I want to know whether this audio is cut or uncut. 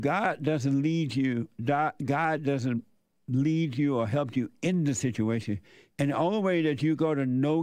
cut